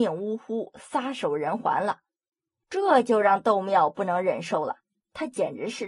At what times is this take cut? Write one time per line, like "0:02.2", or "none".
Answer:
0:02.6

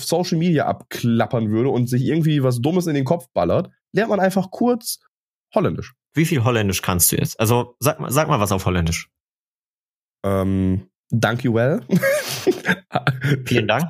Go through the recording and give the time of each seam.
0:06.0

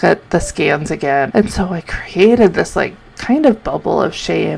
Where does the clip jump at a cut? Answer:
0:01.3

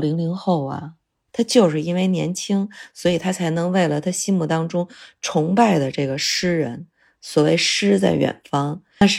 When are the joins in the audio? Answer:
0:01.3

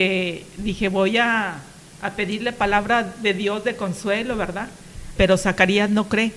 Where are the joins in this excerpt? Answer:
0:05.2

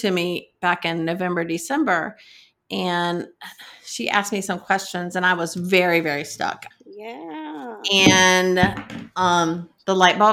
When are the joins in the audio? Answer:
0:06.7

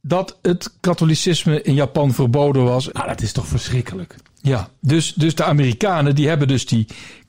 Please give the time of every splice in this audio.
0:02.9

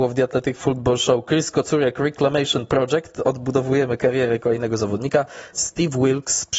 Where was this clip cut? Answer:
0:05.5

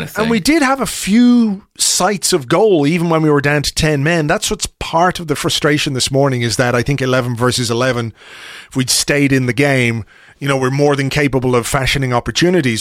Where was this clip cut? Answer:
none

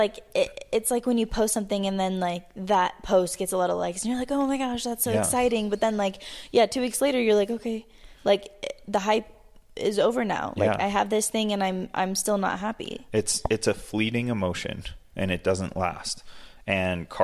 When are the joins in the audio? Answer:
none

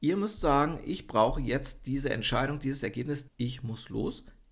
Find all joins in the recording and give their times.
0:03.3

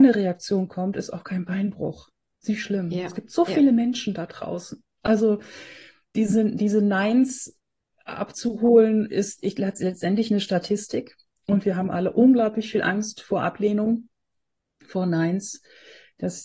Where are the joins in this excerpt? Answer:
none

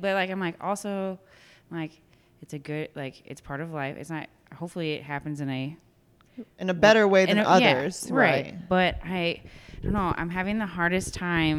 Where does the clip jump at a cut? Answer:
none

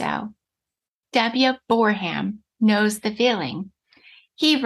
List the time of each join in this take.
0:01.0

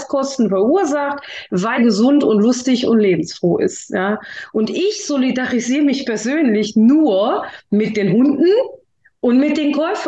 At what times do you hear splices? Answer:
0:01.8
0:04.5

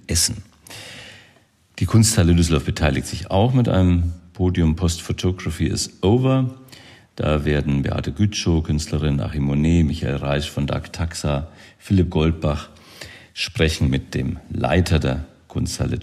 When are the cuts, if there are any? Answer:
none

